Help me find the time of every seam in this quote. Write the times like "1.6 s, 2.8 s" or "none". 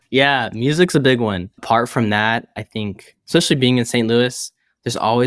none